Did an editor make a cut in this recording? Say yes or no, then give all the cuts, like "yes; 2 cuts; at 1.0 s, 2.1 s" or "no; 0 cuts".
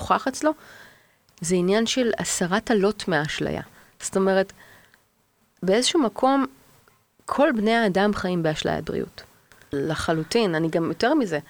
yes; 1 cut; at 9.7 s